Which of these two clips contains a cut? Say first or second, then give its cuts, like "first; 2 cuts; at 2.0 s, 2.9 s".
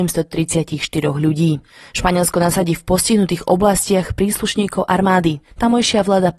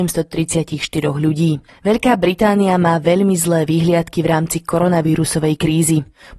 second; 1 cut; at 1.7 s